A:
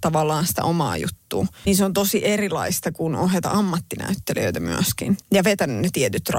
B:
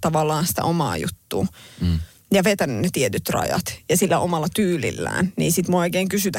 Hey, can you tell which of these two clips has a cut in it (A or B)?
A